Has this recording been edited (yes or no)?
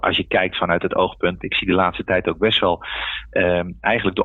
yes